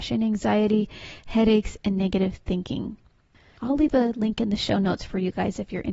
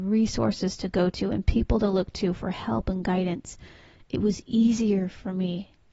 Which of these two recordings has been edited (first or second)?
first